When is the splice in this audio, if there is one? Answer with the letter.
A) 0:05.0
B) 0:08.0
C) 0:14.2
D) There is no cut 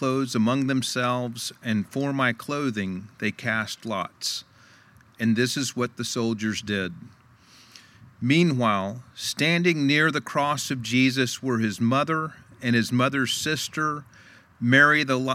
D